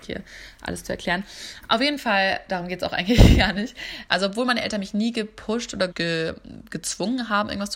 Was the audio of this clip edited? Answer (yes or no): yes